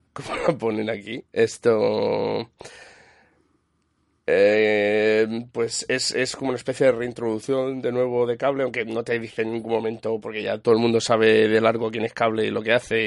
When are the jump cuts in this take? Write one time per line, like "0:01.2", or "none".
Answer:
none